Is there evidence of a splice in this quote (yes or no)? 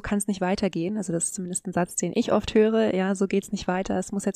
no